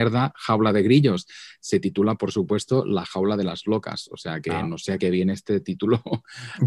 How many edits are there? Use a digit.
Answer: 0